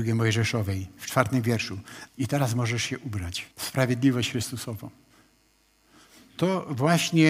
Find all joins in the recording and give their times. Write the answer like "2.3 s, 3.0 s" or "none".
2.1 s, 3.5 s